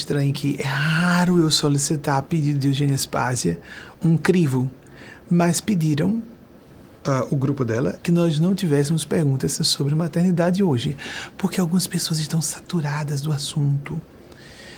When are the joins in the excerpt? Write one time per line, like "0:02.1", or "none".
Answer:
0:03.9
0:08.0